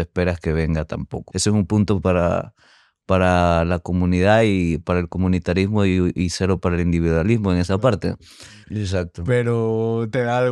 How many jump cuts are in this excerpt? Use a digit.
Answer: 2